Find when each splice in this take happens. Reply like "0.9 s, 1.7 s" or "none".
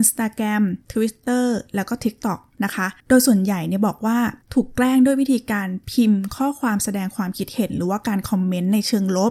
3.0 s, 4.4 s

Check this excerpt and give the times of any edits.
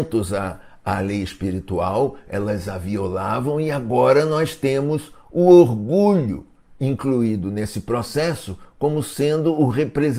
none

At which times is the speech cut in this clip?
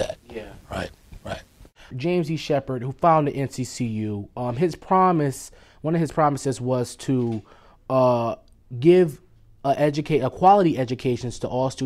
1.9 s

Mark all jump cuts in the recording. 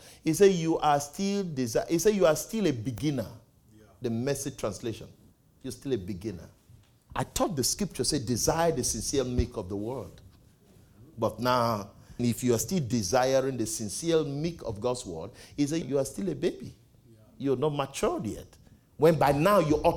7.1 s, 12.2 s, 15.8 s

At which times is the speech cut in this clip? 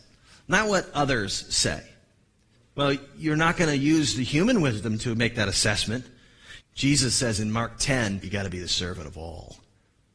2.6 s, 6.6 s, 8.2 s

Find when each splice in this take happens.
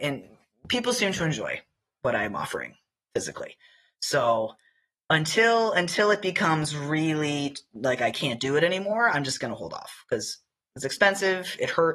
none

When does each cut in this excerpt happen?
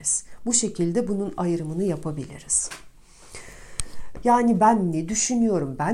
4.2 s

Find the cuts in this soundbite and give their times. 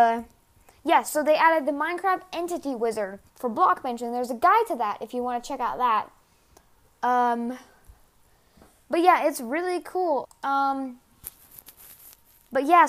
3.3 s, 10.2 s

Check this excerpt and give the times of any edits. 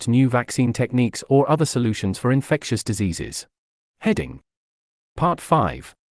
3.8 s

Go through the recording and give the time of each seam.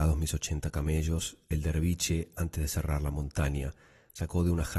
none

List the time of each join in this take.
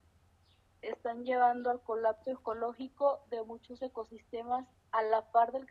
4.7 s

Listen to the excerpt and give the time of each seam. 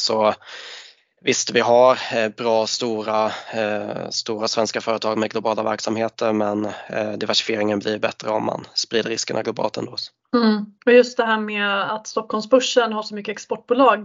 none

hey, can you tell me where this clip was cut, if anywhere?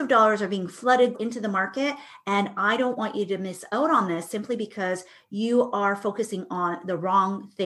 1.1 s

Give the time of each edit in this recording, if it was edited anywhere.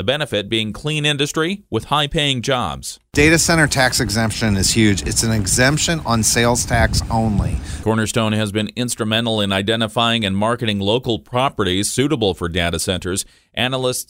7.8 s

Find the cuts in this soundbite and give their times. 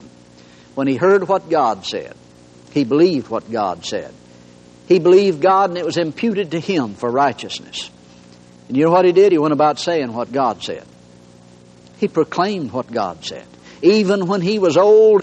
none

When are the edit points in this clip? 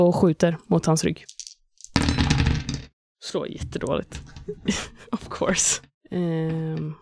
none

